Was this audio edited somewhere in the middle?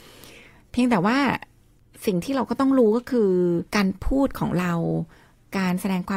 yes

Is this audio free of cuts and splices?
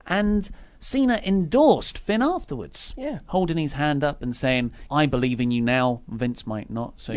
no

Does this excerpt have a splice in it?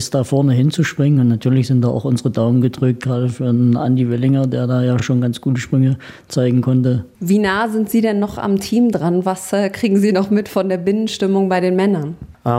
no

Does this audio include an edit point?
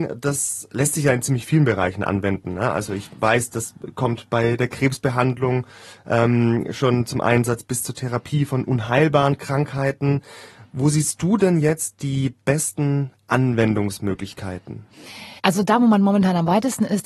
yes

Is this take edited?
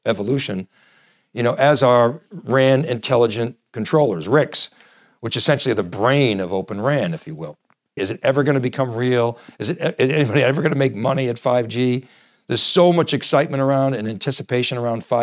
yes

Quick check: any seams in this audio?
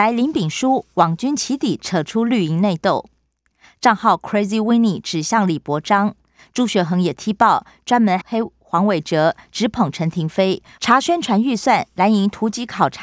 yes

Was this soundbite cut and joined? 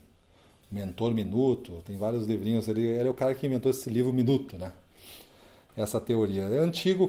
no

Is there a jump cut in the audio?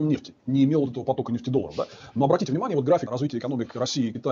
no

